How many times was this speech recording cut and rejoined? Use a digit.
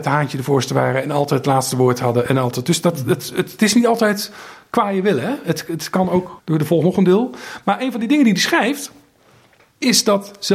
1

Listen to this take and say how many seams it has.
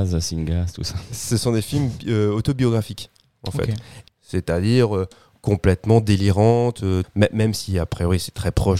2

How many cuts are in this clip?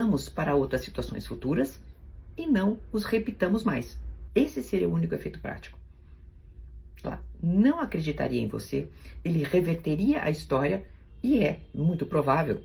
1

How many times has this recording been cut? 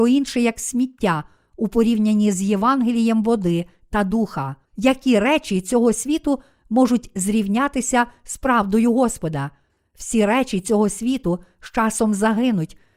1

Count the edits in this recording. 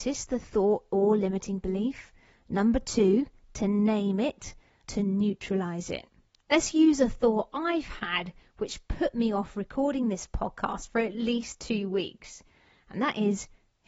2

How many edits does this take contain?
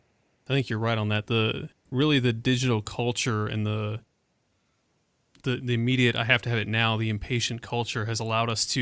0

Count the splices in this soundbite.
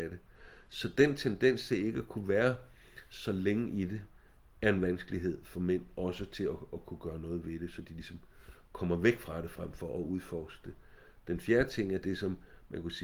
0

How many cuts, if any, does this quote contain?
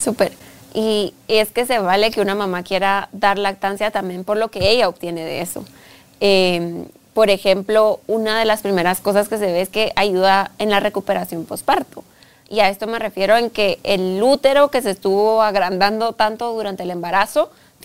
0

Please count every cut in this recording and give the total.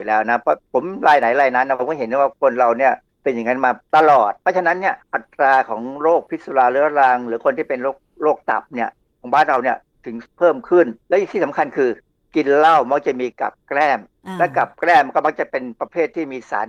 1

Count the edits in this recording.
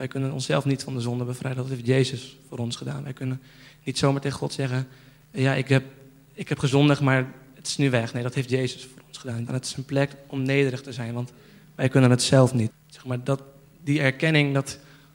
2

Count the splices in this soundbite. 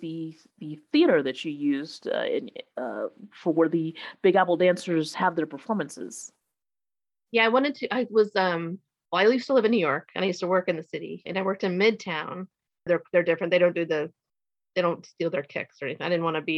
1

